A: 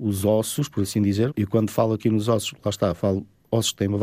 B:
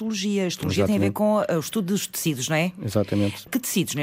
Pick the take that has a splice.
A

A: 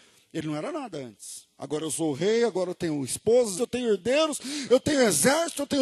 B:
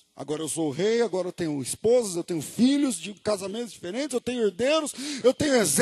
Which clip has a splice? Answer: A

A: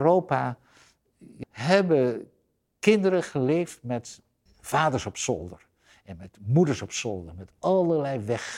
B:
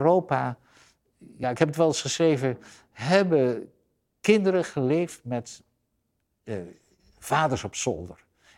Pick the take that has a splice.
A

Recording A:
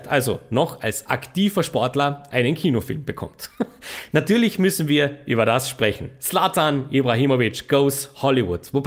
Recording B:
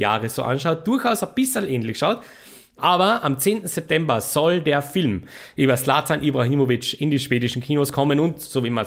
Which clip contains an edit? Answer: B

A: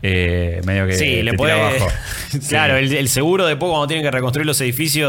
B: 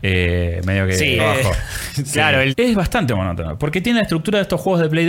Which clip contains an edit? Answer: B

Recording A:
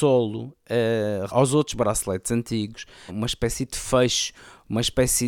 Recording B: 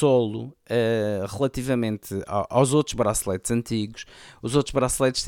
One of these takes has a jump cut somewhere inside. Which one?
A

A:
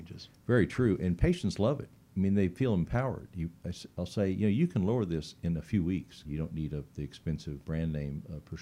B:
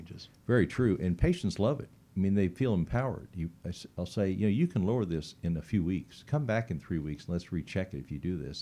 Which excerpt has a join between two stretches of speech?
A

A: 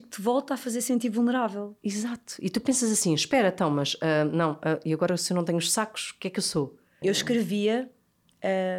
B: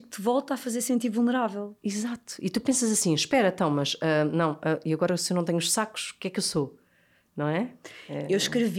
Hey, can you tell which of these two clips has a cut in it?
A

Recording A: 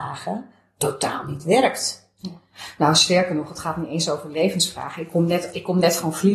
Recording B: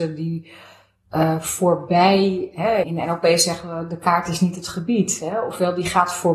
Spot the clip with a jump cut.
B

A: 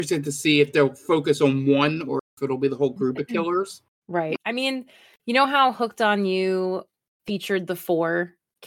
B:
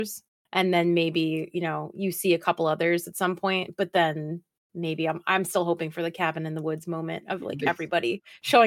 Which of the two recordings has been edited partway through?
A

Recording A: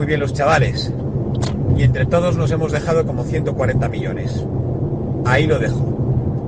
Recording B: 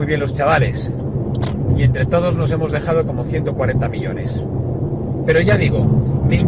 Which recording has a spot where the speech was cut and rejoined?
B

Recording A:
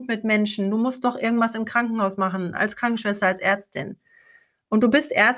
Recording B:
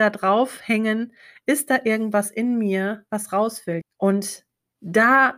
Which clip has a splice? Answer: B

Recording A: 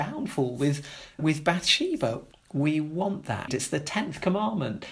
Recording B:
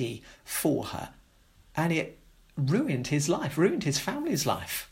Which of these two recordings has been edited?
A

